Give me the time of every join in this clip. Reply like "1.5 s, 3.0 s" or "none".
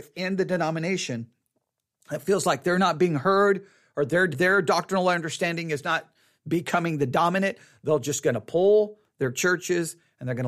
4.3 s